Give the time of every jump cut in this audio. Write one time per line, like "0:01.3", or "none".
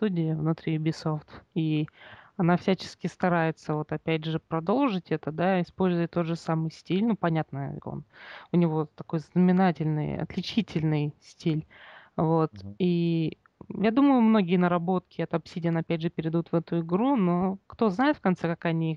0:07.8